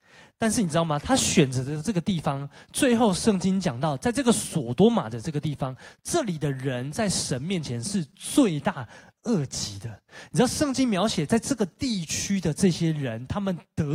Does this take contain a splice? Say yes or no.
yes